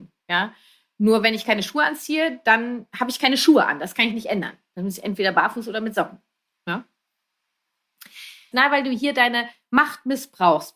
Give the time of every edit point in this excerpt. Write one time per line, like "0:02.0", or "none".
0:08.5